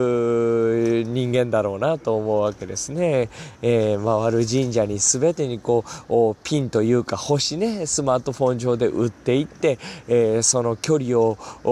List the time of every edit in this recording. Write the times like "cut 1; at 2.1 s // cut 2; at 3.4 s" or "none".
none